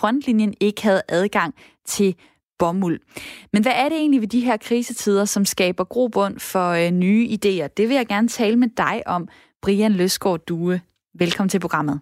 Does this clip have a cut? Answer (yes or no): no